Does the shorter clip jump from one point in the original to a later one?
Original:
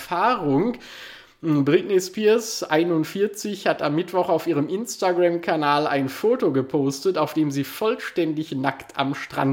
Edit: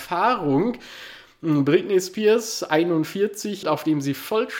yes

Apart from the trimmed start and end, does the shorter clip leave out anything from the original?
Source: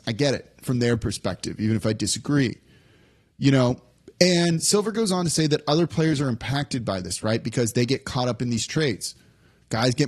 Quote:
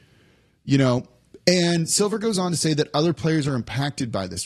no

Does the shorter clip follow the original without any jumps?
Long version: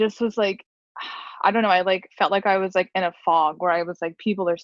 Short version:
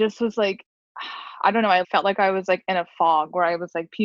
no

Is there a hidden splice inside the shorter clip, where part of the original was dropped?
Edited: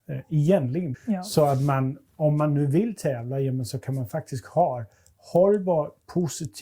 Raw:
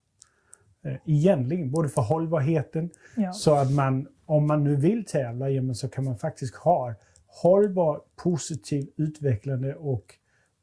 yes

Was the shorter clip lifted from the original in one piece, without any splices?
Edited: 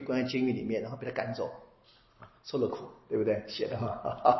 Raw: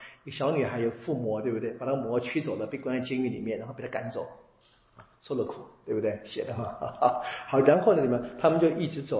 yes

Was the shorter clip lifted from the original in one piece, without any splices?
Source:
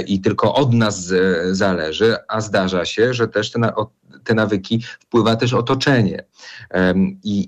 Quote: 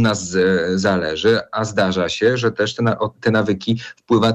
no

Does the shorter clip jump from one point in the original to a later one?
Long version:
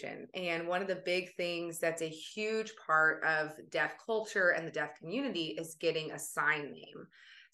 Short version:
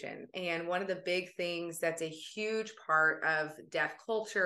no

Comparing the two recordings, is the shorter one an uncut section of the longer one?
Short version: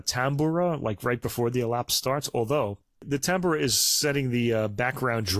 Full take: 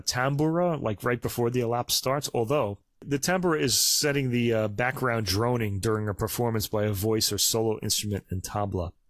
yes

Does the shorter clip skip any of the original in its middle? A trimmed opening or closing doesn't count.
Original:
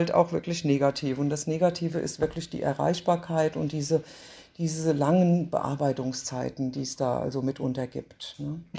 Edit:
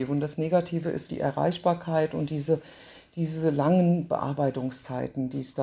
yes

